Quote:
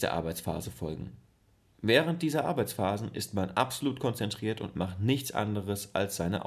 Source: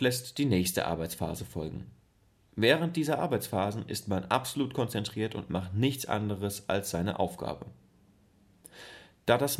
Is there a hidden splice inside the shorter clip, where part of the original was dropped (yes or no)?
no